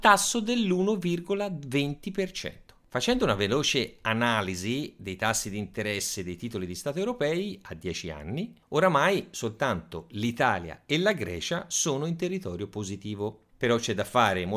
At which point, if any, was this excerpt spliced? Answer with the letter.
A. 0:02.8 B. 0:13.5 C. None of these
B